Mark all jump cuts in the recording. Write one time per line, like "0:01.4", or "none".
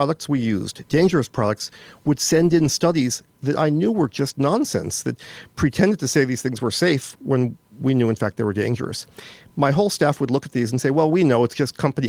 none